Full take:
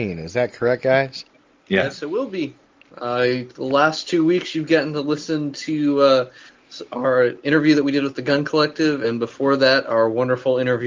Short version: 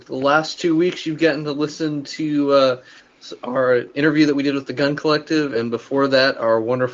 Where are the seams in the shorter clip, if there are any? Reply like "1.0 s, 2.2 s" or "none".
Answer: none

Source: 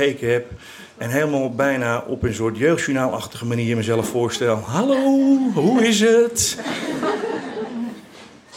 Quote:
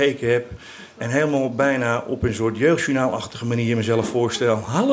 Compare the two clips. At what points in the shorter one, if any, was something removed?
none

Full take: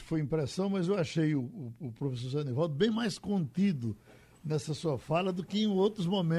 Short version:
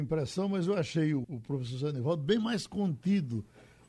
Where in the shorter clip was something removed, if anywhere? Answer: 1.2 s

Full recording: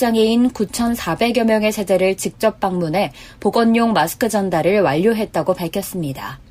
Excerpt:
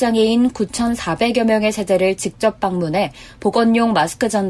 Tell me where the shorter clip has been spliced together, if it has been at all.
none

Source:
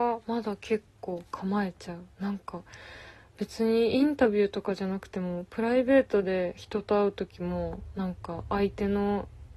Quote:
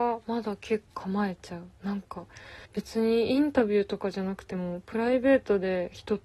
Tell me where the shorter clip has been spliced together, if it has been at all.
0.9 s, 2.7 s

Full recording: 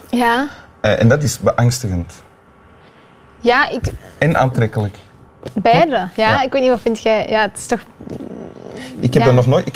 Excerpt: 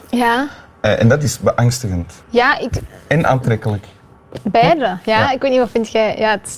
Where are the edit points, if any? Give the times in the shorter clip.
2.2 s

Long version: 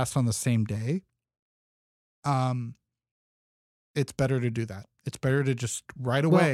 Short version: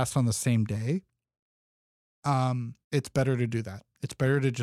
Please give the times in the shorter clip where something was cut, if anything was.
2.8 s

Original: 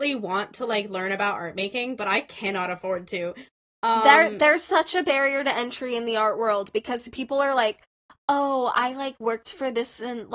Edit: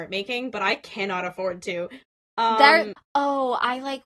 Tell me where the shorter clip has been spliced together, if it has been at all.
2.9 s

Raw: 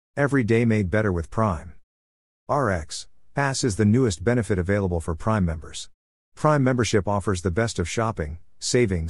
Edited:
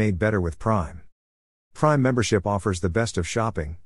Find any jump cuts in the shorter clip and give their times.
1.6 s

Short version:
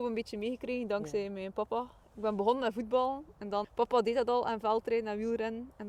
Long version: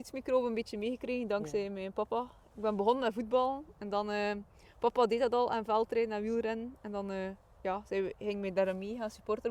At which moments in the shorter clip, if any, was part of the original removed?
3.6 s

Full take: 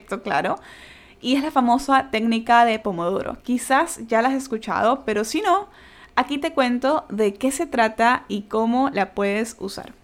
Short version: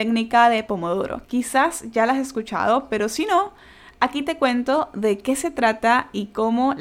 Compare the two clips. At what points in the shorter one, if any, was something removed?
none

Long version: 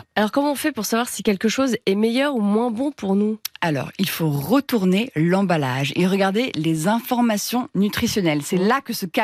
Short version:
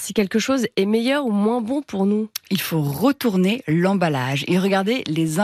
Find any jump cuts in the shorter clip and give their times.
2.4 s

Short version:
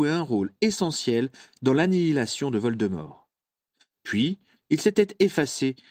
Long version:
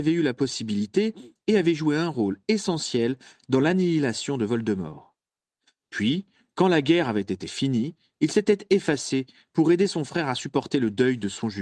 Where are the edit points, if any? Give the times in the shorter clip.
4.6 s

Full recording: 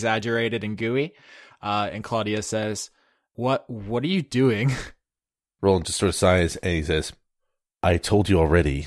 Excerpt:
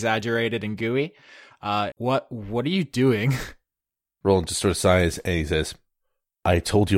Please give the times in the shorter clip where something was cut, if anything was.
1.9 s

